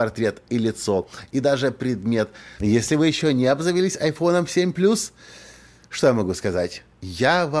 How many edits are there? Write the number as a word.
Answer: one